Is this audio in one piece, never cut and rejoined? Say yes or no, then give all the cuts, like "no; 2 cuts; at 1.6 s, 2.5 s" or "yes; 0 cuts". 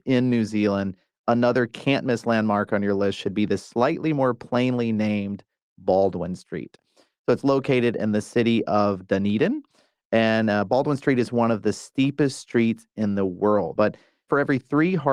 no; 1 cut; at 13.8 s